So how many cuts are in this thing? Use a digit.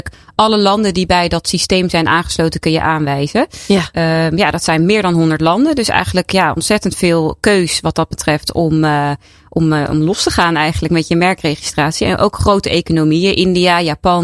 0